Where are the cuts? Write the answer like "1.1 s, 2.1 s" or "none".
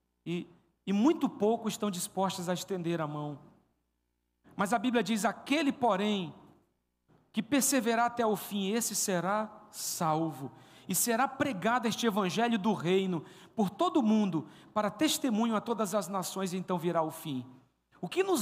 none